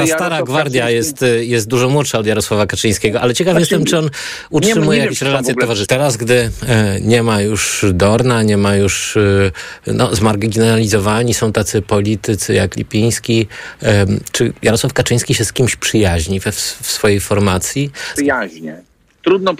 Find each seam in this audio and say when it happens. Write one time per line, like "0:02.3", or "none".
0:05.9
0:18.2

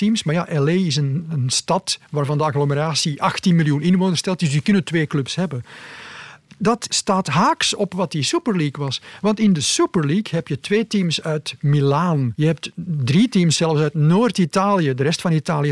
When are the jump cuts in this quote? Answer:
none

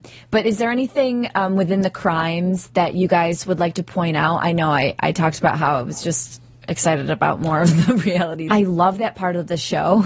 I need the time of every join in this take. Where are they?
0:08.5

